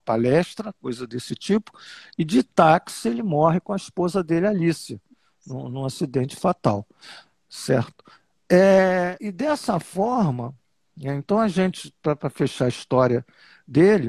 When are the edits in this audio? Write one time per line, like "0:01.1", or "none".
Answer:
0:09.2